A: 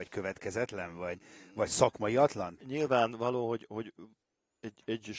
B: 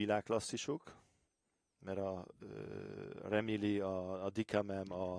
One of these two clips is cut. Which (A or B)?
A